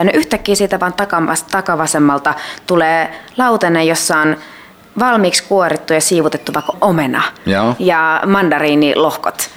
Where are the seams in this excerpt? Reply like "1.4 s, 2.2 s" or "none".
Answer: none